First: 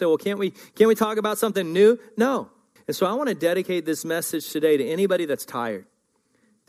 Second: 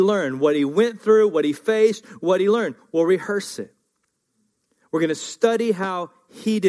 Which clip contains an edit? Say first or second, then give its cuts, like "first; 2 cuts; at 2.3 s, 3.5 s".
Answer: first; 1 cut; at 2.8 s